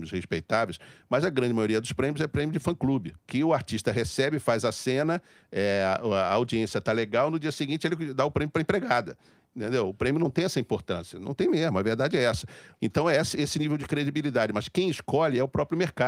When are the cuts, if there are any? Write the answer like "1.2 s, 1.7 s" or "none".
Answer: 3.2 s, 12.8 s